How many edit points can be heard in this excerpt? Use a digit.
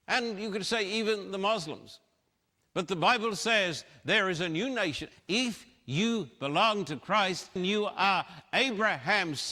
2